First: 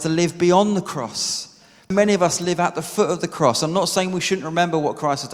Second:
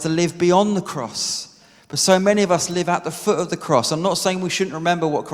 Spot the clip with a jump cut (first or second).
first